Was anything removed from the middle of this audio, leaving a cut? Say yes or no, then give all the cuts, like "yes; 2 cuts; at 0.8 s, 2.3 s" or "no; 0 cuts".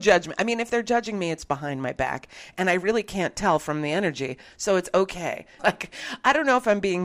yes; 1 cut; at 5.6 s